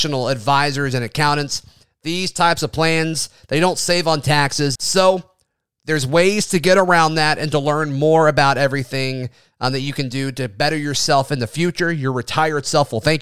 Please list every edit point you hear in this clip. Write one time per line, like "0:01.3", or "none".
0:04.8